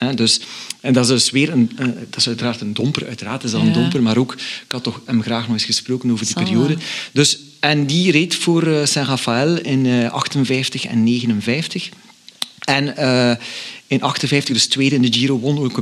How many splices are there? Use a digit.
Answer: 0